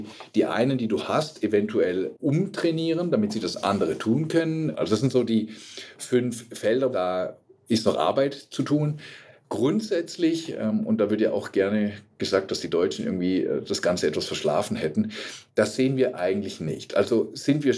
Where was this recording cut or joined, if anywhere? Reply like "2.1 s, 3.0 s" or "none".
4.7 s, 6.9 s